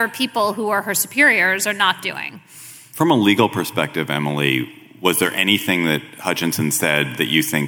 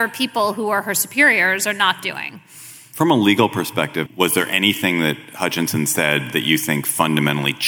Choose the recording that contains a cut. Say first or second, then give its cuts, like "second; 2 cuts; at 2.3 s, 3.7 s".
second; 1 cut; at 4.1 s